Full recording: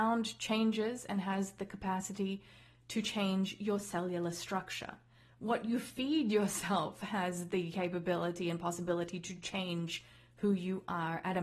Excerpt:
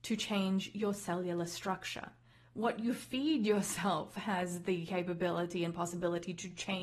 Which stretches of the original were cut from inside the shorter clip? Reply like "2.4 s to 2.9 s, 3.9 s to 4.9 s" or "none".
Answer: none